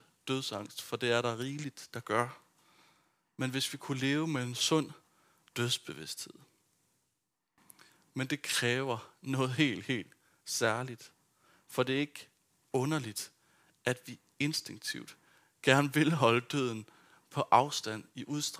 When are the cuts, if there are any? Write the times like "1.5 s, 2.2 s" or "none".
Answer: none